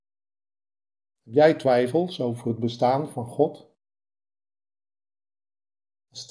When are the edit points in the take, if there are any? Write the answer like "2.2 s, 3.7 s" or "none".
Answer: 1.1 s